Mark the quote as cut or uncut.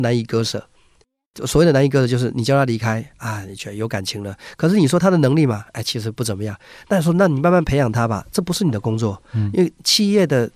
uncut